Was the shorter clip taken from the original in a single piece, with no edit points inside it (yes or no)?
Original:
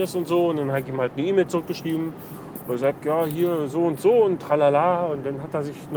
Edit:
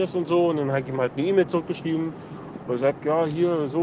yes